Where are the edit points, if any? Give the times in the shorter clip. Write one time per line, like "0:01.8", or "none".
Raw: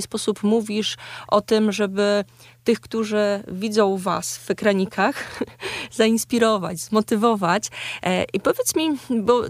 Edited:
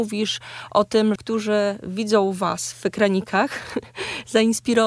0:01.2